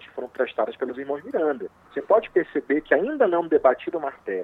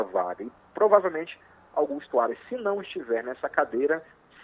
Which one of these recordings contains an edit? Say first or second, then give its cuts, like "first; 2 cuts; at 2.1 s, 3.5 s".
first; 1 cut; at 1.9 s